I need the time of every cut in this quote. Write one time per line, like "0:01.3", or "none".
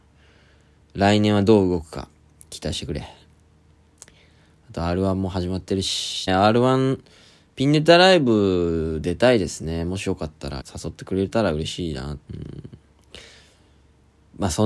0:06.3
0:10.6
0:12.3